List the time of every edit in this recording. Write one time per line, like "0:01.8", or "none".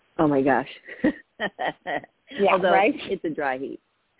0:01.2